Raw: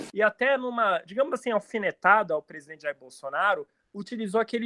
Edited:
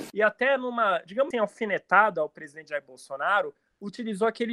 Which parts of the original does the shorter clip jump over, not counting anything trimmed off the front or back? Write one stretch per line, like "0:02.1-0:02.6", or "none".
0:01.3-0:01.4